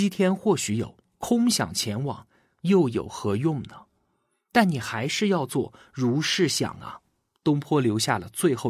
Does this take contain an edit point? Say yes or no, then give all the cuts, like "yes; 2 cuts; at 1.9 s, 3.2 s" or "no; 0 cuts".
no; 0 cuts